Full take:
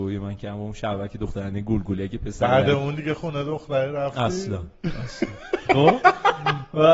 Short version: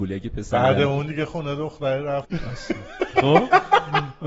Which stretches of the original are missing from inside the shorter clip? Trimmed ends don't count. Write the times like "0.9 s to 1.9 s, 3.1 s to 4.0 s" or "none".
4.1 s to 4.8 s